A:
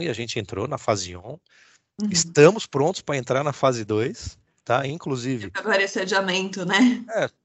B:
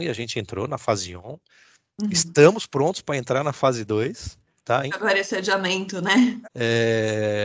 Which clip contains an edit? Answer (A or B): B